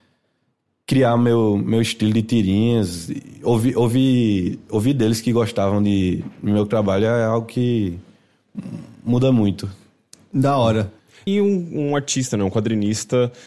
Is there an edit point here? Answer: yes; 1 cut; at 11.3 s

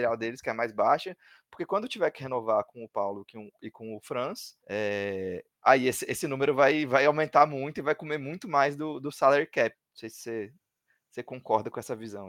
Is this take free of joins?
no; 2 cuts; at 4.6 s, 9.7 s

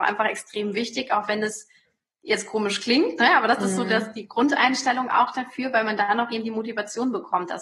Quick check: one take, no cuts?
yes; 0 cuts

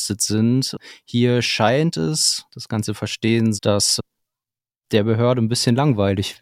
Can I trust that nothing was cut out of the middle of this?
no; 2 cuts; at 2.5 s, 3.6 s

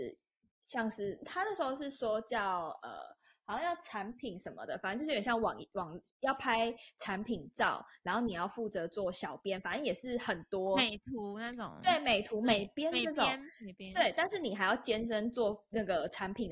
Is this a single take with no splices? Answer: no; 1 cut; at 6.1 s

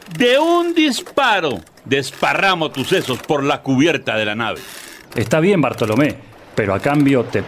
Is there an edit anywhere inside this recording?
yes; 2 cuts; at 5.1 s, 6.3 s

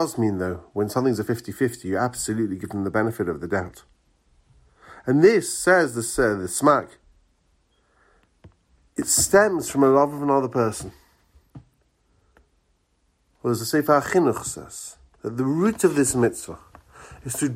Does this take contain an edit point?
no; 0 cuts

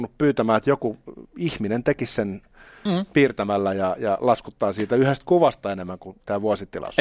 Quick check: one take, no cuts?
yes; 0 cuts

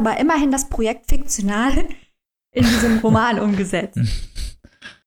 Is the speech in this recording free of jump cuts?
yes; 0 cuts

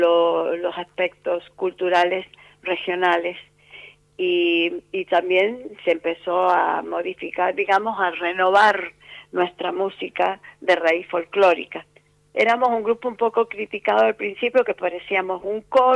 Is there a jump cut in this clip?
no; 0 cuts

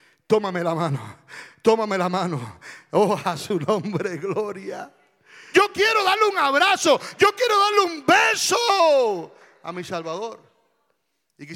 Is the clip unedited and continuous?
no; 1 cut; at 5.5 s

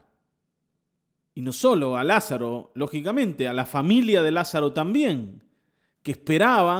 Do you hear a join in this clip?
yes; 1 cut; at 1.2 s

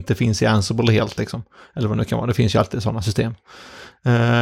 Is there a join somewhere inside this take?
no; 0 cuts

